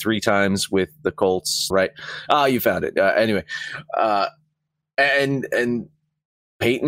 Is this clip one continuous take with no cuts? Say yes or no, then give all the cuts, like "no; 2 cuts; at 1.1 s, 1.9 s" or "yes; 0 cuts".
no; 1 cut; at 1.7 s